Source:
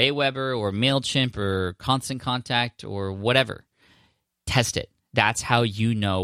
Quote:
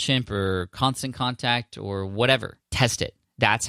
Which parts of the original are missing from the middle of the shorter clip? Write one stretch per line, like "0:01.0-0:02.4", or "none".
0:03.7-0:04.4